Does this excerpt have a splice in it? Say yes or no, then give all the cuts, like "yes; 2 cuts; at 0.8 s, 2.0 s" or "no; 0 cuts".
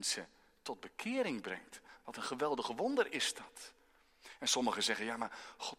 no; 0 cuts